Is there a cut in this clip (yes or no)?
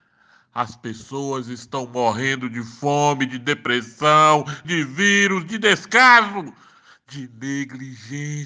yes